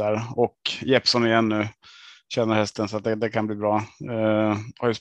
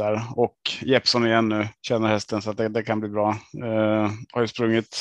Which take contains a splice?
second; 1 cut; at 1.8 s

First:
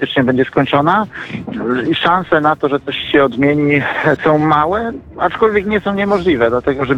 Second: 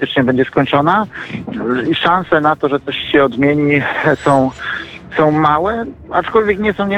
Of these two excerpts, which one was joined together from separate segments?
first; 1 cut; at 4.2 s

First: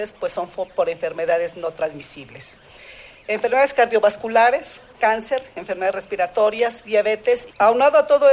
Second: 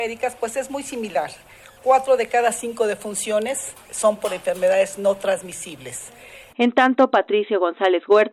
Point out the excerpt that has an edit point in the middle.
second; 1 cut; at 6.5 s

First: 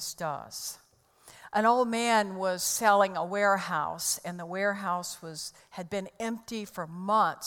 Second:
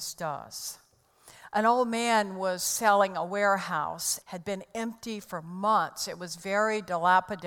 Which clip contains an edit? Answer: second; 1 cut; at 4.2 s

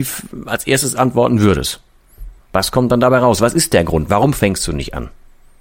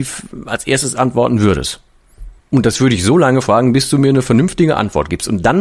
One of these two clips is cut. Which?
second; 1 cut; at 2.4 s

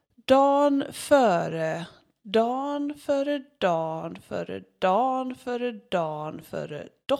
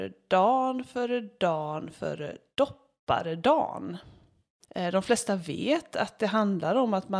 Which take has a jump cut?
second; 1 cut; at 4.6 s

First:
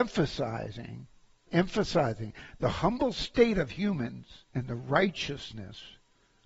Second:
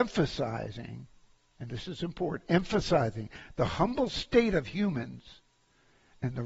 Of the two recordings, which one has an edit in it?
first; 2 cuts; at 1.5 s, 4.5 s

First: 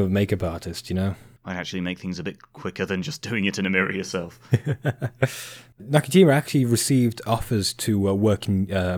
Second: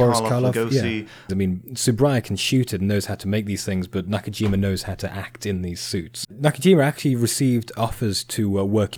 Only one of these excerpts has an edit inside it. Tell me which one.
second; 2 cuts; at 1.3 s, 6.2 s

